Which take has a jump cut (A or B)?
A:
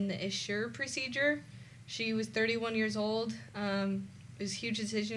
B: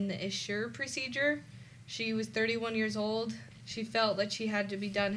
B